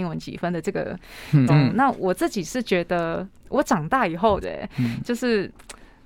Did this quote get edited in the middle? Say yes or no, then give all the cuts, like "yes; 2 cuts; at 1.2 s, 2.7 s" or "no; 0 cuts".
yes; 2 cuts; at 1.5 s, 4.4 s